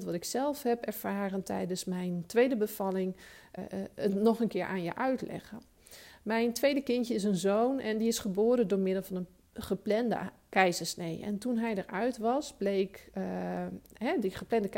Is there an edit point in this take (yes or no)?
yes